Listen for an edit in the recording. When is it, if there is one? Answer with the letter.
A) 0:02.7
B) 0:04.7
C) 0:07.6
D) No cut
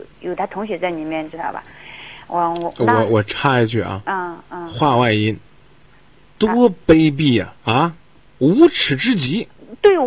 C